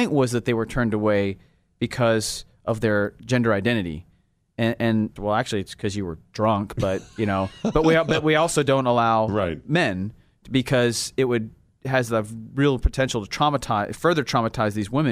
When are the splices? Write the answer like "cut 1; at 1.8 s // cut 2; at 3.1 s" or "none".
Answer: cut 1; at 5.2 s